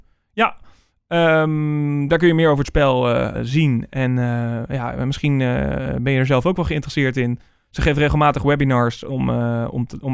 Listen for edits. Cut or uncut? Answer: cut